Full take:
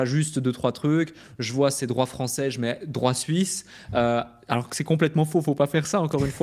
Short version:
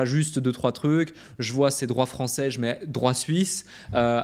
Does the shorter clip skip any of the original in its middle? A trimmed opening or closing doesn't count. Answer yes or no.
no